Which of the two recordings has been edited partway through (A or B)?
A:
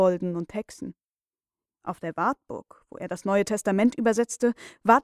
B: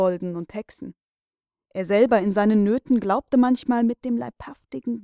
A